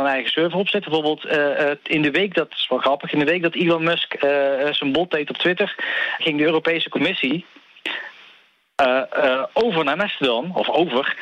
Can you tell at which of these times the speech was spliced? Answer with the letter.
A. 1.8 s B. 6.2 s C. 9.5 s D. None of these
B